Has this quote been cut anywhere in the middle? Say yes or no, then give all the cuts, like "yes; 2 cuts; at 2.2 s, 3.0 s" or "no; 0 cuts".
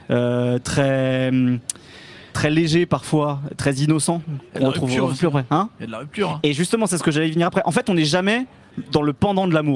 yes; 1 cut; at 2.3 s